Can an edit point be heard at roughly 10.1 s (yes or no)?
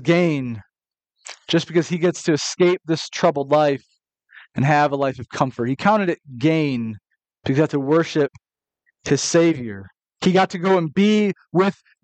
no